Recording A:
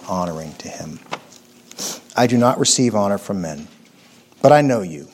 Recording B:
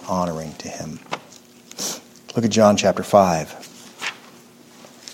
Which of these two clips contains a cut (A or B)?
A